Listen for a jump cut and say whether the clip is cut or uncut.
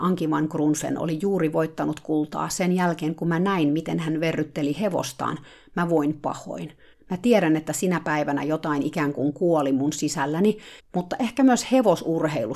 cut